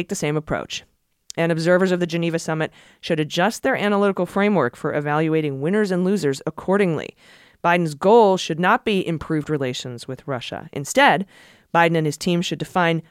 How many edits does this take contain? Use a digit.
0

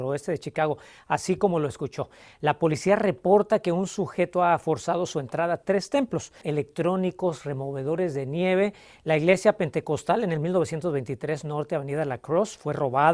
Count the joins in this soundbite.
1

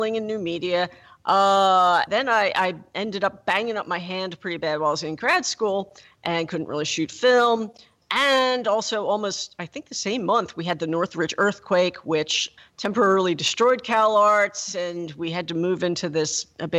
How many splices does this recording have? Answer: 3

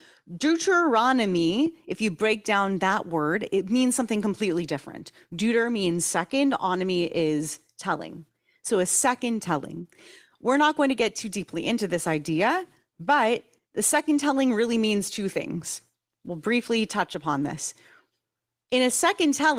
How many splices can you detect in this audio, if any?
0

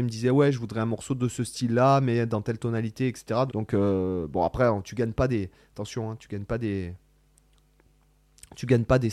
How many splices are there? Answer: 1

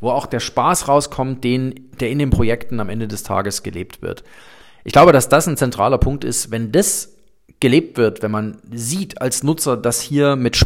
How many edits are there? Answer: 0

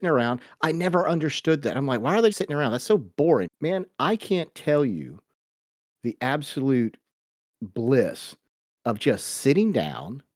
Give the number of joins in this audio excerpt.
2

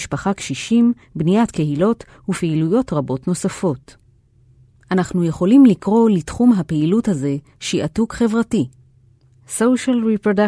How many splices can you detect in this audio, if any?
0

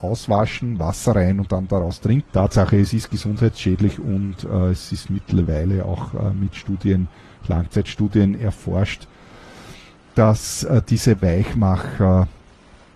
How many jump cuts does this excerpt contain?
1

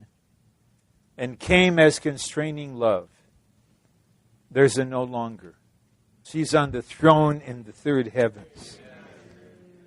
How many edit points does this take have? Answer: 1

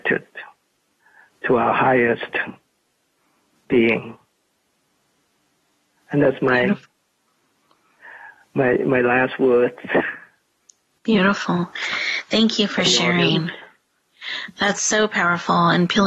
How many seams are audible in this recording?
0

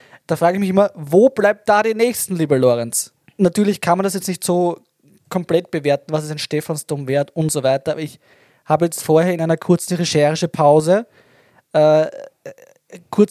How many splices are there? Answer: 0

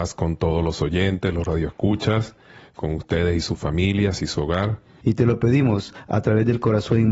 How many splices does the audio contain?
1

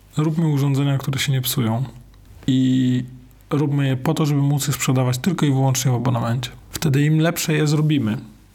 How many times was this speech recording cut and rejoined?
1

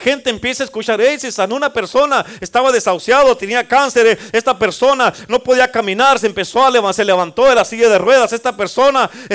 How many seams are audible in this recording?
0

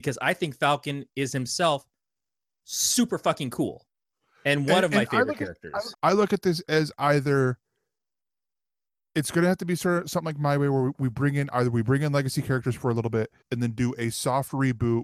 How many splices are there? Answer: 2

